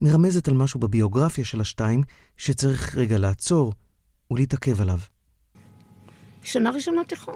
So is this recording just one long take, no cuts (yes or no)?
no